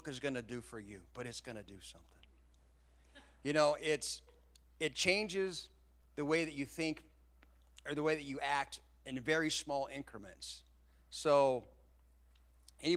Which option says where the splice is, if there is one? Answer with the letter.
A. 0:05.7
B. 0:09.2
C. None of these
C